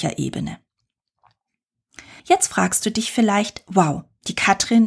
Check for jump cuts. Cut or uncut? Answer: cut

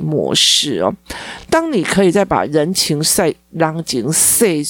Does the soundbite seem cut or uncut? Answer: uncut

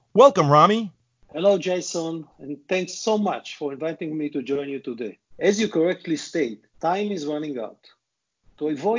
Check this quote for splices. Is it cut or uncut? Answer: cut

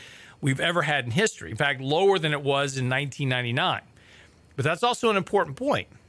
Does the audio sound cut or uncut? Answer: uncut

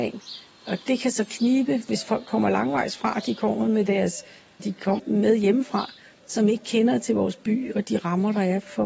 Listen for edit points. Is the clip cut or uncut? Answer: cut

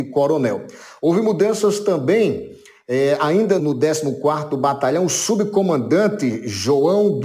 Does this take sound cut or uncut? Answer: cut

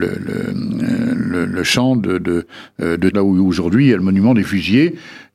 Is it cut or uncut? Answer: cut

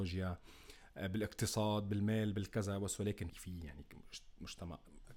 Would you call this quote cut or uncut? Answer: cut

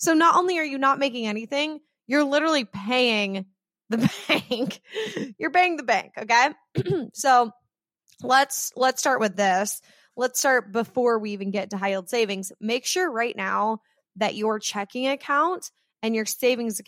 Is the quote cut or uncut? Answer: uncut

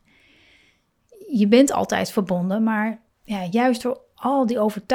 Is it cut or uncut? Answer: uncut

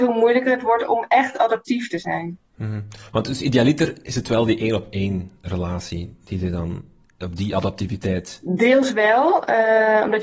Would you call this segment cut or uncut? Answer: uncut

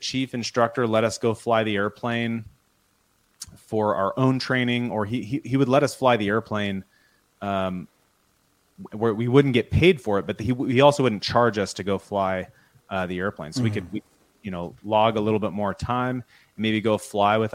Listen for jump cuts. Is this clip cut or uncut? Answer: uncut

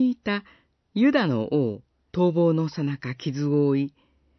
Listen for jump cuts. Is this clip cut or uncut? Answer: cut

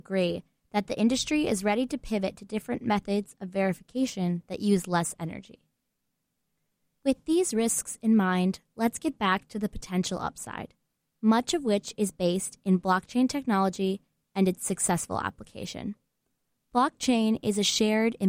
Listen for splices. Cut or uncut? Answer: uncut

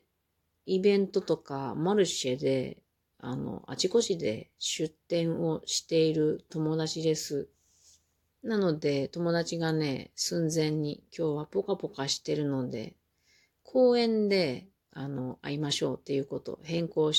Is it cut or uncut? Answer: cut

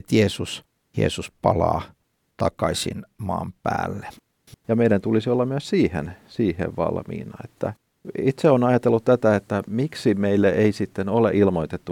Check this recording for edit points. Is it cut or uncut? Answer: cut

